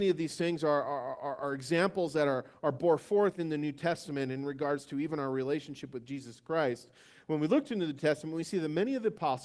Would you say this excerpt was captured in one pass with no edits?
yes; 0 cuts

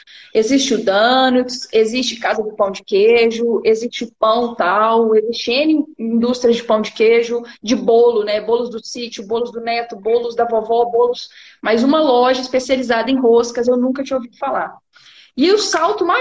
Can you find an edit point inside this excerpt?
no; 0 cuts

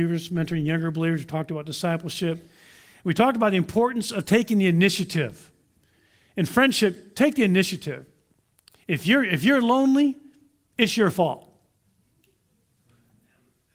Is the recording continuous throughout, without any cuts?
yes; 0 cuts

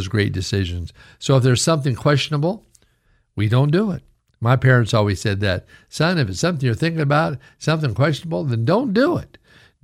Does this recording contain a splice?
no; 0 cuts

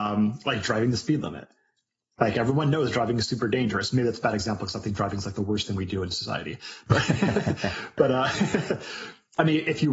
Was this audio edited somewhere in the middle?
no; 0 cuts

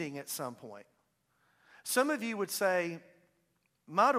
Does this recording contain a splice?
no; 0 cuts

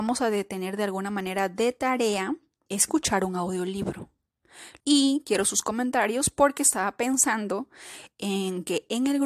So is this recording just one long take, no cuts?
no; 2 cuts; at 2.7 s, 4.8 s

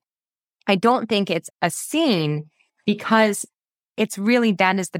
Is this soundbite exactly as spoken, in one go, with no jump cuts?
no; 1 cut; at 1.5 s

